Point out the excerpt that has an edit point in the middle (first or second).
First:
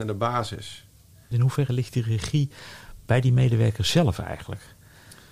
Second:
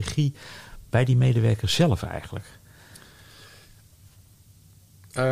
first